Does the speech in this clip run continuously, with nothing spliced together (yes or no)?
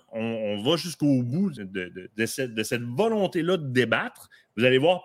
no